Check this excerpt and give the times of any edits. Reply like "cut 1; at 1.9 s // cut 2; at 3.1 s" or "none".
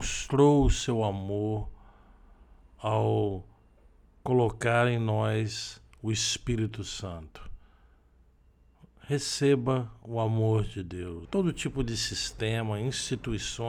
cut 1; at 11.3 s